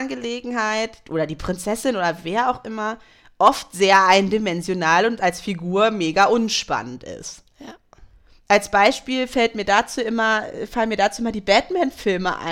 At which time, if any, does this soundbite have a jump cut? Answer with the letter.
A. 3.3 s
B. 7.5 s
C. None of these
C